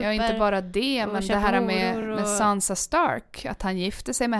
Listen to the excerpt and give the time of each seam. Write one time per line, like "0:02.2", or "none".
none